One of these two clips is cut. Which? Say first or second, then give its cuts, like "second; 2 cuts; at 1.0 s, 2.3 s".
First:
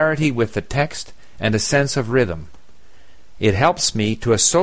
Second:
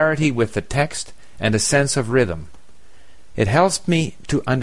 first; 1 cut; at 3.3 s